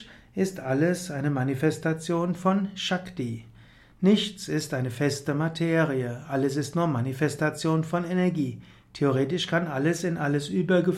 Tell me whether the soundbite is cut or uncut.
uncut